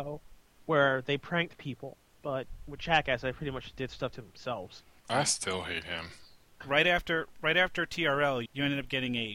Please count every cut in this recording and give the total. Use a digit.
3